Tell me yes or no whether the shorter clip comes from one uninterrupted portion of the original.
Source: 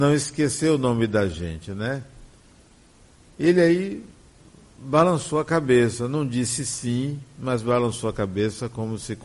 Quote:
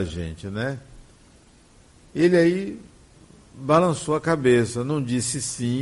yes